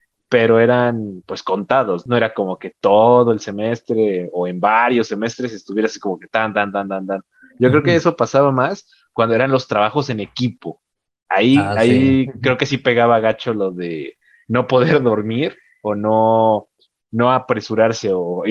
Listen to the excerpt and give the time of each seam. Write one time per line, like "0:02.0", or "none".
none